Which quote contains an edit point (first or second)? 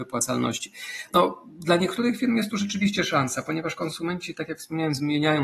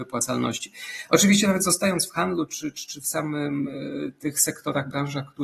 first